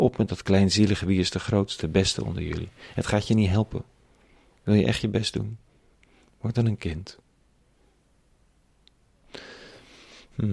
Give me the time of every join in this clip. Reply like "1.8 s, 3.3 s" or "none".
1.8 s